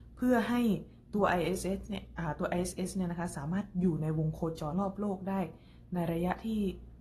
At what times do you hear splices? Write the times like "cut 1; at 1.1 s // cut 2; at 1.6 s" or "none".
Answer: cut 1; at 4.7 s